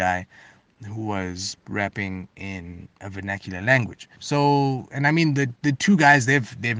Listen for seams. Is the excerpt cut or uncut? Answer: cut